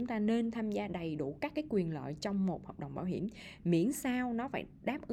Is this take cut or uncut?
uncut